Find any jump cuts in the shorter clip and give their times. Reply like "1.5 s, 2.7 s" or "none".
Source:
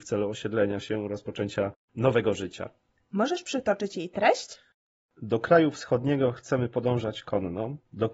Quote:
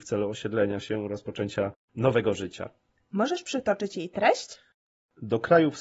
none